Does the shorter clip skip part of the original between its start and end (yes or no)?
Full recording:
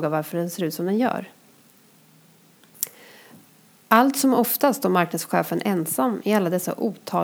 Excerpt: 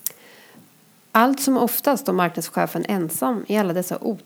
no